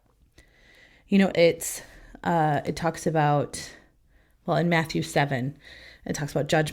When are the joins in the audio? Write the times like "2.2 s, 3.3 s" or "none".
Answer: 1.3 s

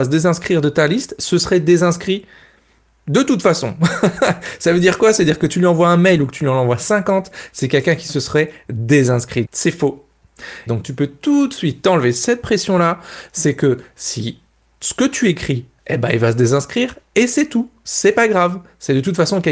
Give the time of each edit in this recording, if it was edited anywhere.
9.4 s, 10.7 s, 15.8 s

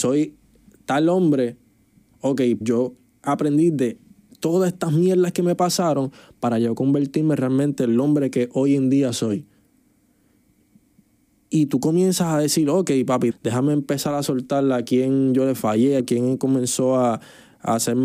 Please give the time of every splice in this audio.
2.6 s, 13.3 s, 16.0 s

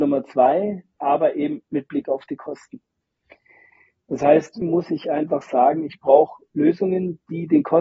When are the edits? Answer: 1.0 s, 4.6 s

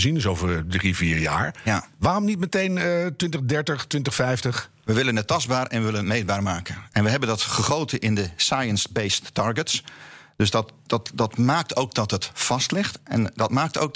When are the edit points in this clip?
none

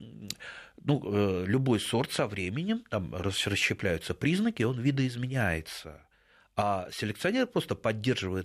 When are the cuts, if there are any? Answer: none

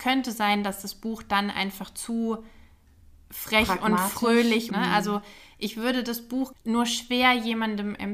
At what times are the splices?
4.7 s, 6.5 s

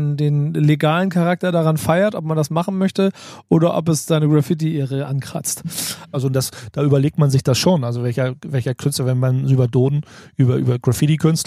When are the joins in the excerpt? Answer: 6.1 s

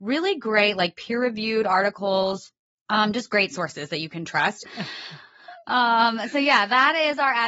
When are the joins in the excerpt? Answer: 4.6 s

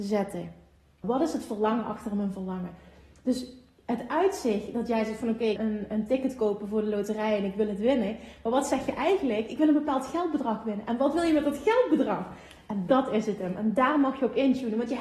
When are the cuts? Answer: 1.0 s, 5.6 s

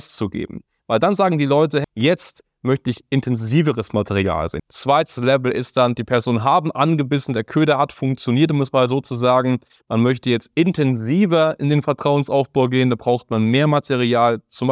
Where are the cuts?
1.8 s, 4.6 s

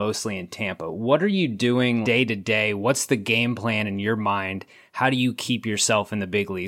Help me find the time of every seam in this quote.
2.0 s

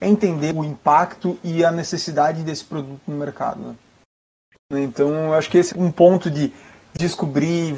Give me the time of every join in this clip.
4.5 s, 5.7 s

